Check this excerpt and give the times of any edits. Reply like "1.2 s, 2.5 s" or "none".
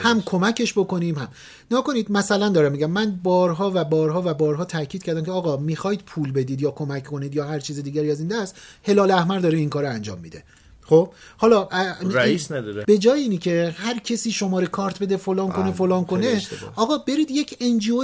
12.8 s